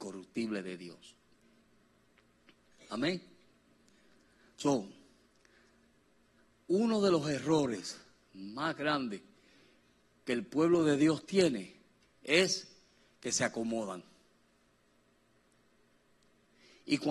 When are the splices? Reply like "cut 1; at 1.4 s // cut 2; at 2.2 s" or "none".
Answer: none